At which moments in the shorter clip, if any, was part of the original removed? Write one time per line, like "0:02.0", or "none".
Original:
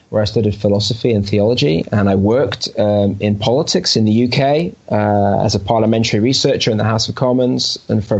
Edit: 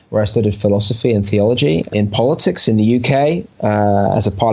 0:01.9